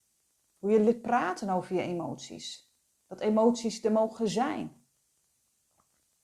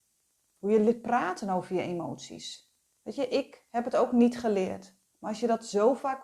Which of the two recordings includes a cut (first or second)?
second